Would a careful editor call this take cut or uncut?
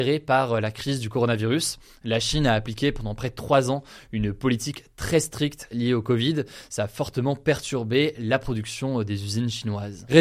uncut